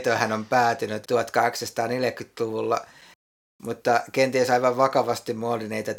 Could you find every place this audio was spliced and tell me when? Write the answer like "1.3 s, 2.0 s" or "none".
1.0 s